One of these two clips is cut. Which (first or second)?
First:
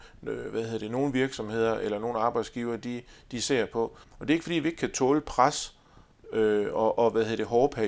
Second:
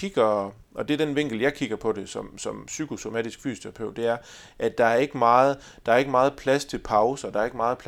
first